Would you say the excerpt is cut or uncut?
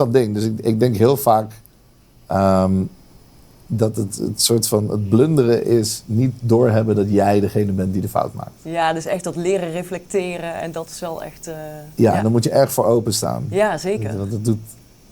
uncut